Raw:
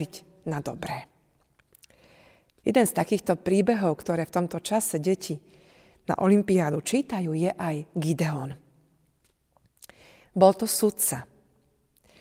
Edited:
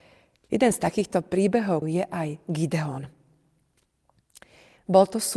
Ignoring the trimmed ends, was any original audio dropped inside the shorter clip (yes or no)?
yes